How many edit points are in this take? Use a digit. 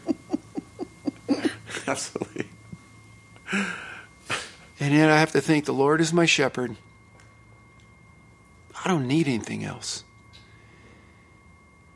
0